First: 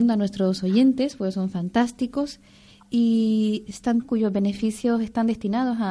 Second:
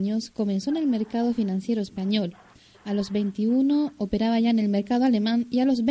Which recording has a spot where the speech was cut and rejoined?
first; 1 cut; at 4.0 s

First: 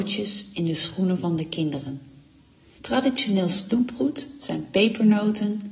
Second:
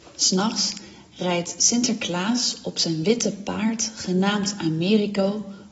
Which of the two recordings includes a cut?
first; 1 cut; at 2.8 s

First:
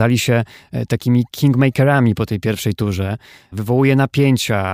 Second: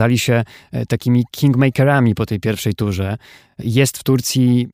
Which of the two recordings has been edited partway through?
first; 1 cut; at 3.5 s

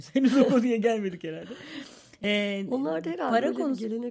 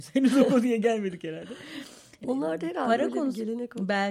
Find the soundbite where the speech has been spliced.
second; 1 cut; at 2.2 s

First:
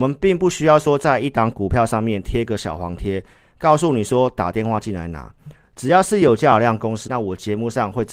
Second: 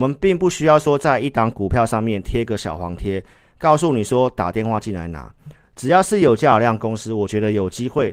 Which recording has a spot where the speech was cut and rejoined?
first; 1 cut; at 7.1 s

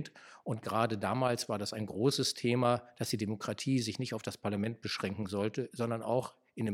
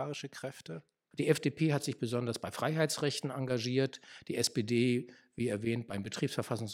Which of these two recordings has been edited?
second; 1 cut; at 1.1 s

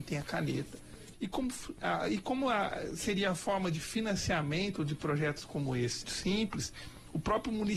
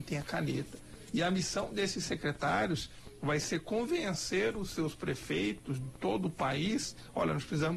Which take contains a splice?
first; 2 cuts; at 1.1 s, 6.0 s

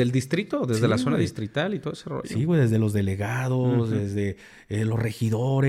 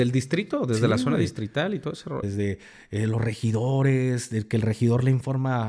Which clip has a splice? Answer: second; 1 cut; at 2.2 s

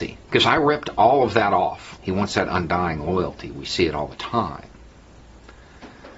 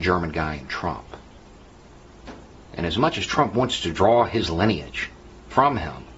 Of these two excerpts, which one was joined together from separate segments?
first; 1 cut; at 2.0 s

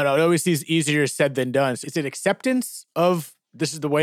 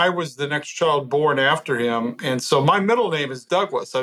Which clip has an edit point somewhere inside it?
first; 1 cut; at 1.8 s

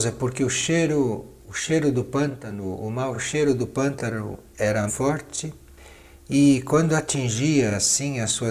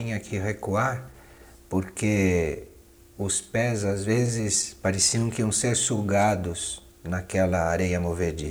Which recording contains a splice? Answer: first; 1 cut; at 4.9 s

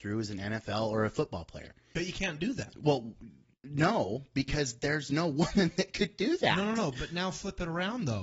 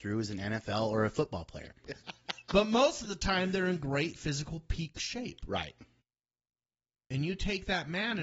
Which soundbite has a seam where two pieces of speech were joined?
second; 1 cut; at 1.8 s

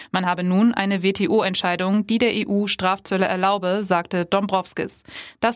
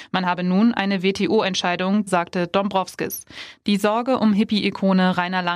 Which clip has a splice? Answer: second; 2 cuts; at 2.1 s, 3.6 s

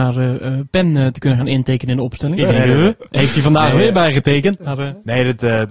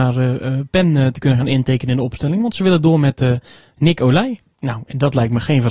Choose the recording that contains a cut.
first; 1 cut; at 2.3 s

